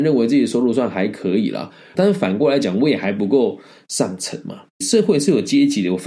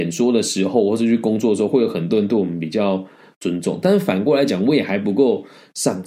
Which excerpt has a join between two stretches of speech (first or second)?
first